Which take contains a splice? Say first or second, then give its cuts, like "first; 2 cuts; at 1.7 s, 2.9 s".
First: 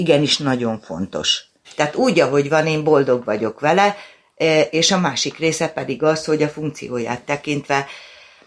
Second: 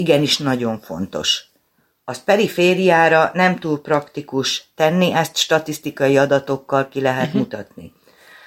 first; 2 cuts; at 1.6 s, 4.7 s